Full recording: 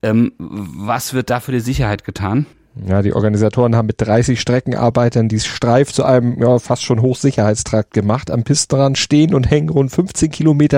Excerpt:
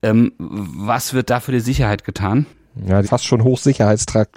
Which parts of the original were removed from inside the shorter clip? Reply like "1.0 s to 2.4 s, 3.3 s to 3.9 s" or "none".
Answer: 3.0 s to 6.6 s